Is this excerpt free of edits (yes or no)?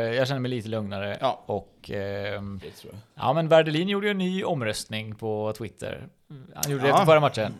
no